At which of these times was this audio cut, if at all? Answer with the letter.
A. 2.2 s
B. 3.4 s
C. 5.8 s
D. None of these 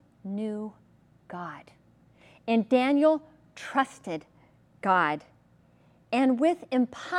D